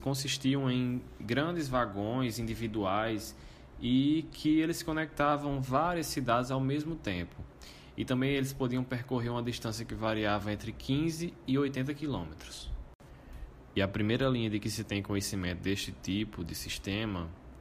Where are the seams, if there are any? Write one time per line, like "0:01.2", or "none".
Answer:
none